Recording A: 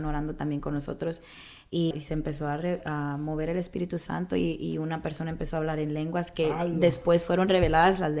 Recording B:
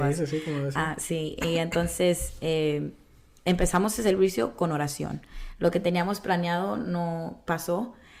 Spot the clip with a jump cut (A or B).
A